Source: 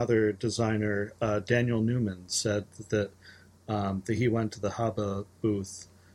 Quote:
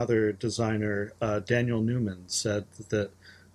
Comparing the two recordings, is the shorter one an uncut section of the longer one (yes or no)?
yes